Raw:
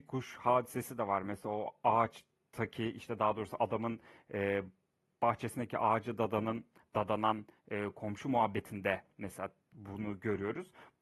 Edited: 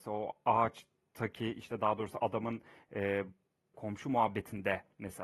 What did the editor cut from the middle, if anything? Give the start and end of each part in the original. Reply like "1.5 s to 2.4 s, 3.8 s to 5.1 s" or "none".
5.1 s to 7.9 s

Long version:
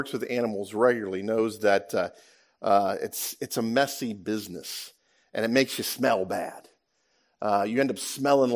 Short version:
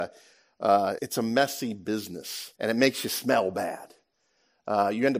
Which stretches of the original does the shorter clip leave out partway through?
3.0 s to 3.4 s, 4.9 s to 5.3 s

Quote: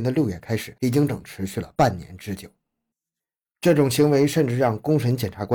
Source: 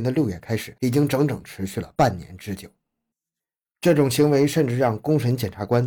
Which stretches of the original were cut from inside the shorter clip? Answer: 1.1 s to 1.3 s

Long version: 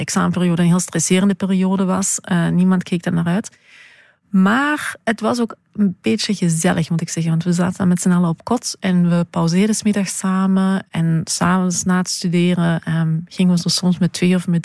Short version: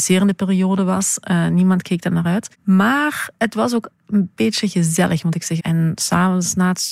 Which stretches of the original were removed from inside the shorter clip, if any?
3.5 s to 4.2 s, 7.3 s to 10.9 s

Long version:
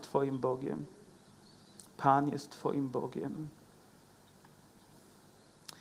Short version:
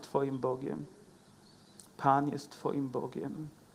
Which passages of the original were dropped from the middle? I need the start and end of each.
none

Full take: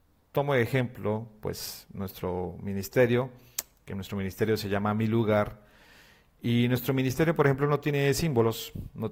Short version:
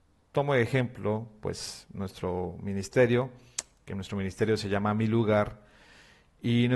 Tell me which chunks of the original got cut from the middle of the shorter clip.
none

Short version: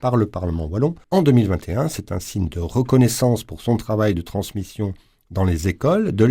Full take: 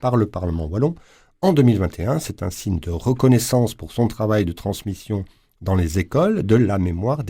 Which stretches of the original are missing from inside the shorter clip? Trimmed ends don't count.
1.0 s to 1.3 s

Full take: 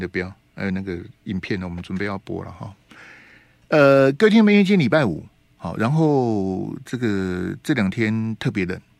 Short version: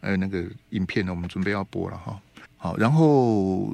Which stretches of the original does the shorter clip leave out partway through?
3.0 s to 5.4 s

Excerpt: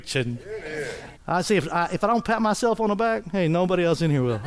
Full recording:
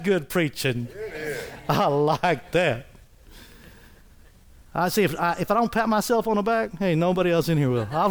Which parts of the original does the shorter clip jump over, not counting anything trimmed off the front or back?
1.6 s to 4.6 s

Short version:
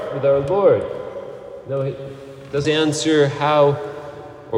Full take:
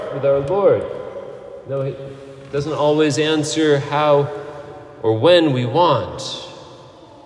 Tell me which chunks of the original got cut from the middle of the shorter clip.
2.6 s to 3.2 s

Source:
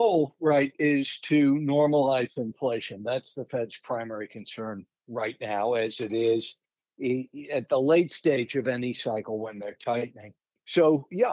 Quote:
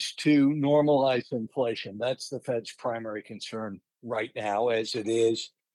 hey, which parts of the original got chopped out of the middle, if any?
none

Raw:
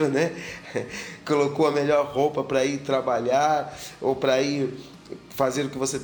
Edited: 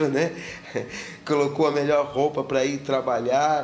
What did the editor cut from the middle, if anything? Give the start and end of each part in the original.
none

